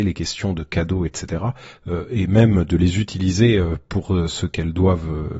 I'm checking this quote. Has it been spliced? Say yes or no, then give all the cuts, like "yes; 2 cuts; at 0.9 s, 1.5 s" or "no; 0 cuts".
no; 0 cuts